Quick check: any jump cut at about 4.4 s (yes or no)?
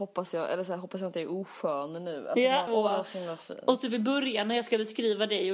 no